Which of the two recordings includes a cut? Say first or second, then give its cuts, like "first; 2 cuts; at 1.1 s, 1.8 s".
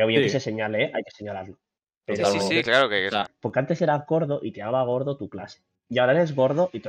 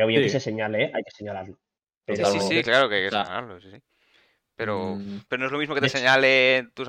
first; 1 cut; at 3.3 s